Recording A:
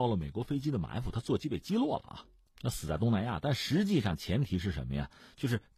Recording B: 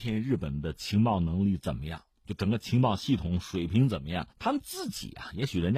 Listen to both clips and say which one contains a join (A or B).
B